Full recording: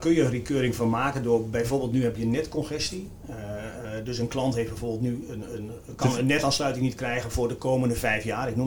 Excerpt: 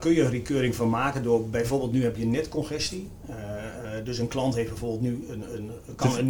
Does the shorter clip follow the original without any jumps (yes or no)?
yes